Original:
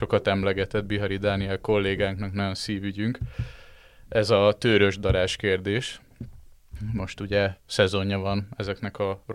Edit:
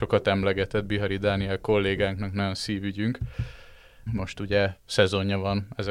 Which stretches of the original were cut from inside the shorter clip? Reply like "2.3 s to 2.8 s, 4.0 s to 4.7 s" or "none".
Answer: 4.1 s to 6.9 s